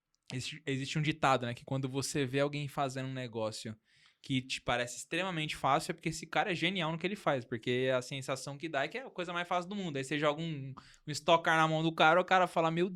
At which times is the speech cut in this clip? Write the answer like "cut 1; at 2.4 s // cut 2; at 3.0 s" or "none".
none